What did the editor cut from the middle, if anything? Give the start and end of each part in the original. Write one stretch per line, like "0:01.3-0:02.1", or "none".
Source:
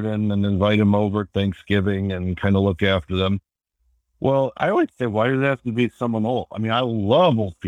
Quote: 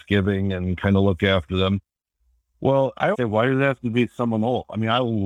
0:04.7-0:04.9